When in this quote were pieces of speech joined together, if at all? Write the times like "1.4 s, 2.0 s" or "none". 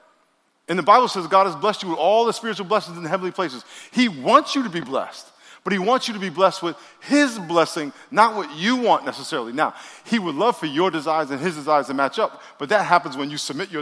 none